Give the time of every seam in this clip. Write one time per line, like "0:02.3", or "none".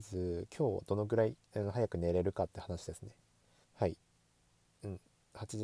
0:03.6